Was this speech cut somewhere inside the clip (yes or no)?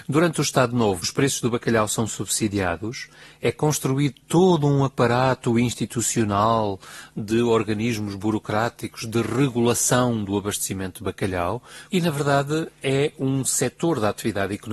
no